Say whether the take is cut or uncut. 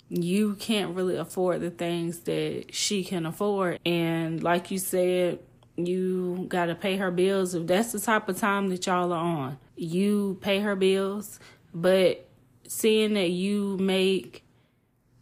cut